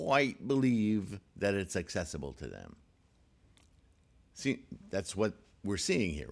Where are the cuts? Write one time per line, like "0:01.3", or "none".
none